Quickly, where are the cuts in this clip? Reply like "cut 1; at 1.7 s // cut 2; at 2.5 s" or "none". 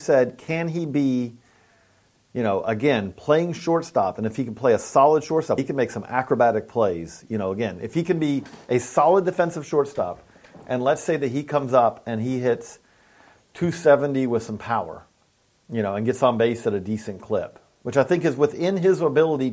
cut 1; at 5.6 s